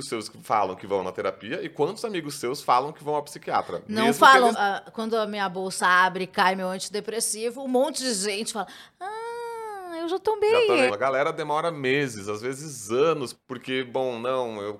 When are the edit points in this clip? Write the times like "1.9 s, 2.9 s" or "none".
4.5 s, 10.9 s, 13.3 s